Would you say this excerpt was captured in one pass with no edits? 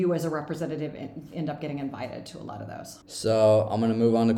no; 1 cut; at 3.0 s

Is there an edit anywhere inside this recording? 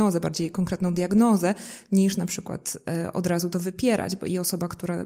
no; 0 cuts

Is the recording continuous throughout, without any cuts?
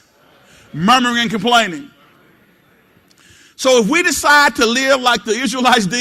yes; 0 cuts

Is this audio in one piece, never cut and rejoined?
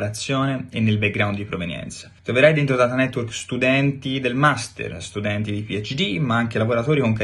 no; 1 cut; at 2.2 s

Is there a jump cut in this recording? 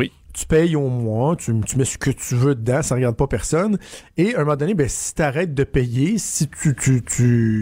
no; 0 cuts

